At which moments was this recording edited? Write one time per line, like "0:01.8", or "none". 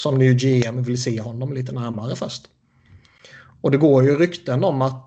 none